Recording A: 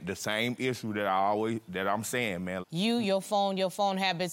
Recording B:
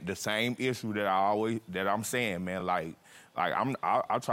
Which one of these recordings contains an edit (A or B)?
A